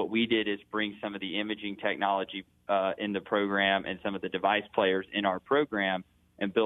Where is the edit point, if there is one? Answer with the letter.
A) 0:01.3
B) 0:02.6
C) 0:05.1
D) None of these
D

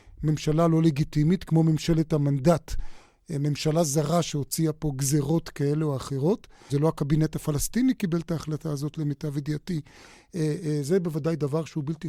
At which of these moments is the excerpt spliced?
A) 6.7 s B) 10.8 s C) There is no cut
A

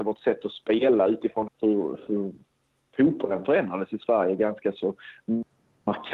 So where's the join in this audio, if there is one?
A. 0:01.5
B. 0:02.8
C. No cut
A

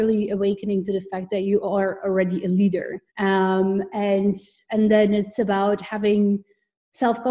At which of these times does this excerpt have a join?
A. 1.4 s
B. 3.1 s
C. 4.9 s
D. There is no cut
B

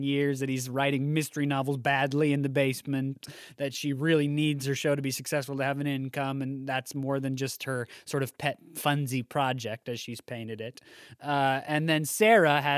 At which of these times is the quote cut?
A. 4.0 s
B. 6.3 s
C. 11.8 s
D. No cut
D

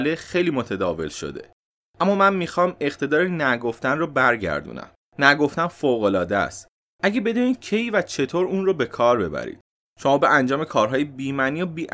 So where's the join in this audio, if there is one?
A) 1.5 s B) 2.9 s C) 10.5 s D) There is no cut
D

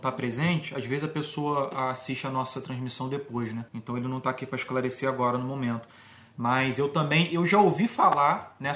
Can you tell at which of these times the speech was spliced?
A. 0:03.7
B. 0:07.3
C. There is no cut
A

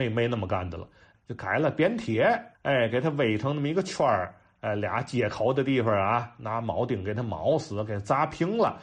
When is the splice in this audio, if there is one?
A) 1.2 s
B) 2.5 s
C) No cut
B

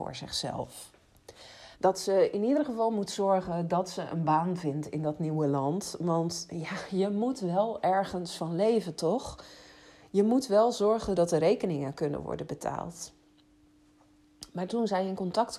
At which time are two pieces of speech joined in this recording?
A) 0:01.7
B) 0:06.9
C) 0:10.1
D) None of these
A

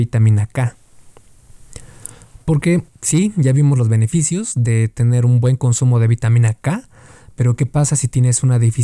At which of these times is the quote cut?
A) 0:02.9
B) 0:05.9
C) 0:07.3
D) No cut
A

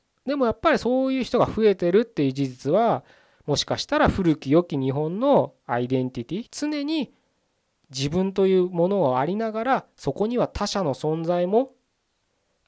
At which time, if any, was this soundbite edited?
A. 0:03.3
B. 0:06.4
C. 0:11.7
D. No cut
B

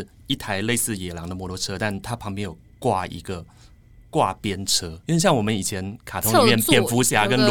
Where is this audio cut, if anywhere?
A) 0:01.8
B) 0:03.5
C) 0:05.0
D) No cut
C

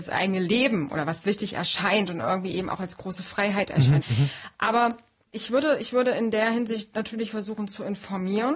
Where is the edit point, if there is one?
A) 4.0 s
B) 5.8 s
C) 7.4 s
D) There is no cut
A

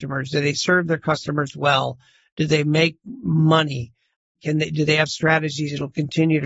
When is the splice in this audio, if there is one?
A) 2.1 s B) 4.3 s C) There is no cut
C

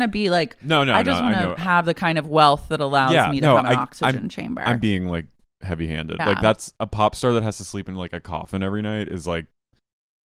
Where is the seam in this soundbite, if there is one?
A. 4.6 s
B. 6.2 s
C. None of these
B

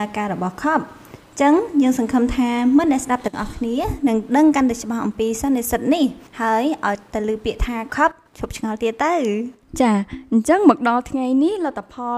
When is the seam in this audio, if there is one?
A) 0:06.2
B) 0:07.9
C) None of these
B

